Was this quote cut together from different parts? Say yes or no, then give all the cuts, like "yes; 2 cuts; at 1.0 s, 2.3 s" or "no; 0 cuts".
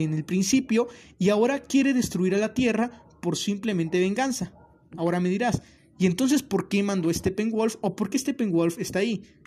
no; 0 cuts